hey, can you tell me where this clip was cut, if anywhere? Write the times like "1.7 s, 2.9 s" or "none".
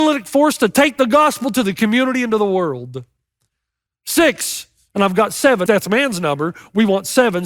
5.7 s